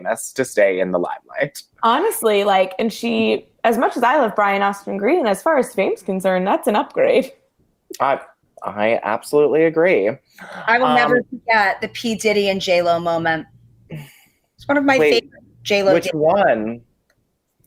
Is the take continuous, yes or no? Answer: yes